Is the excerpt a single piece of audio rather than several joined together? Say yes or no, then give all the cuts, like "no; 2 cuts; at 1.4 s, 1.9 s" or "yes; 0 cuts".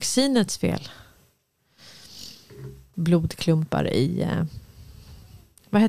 no; 1 cut; at 2.9 s